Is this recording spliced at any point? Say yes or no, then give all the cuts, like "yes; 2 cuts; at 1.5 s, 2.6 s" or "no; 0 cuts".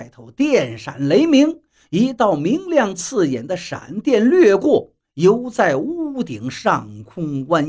no; 0 cuts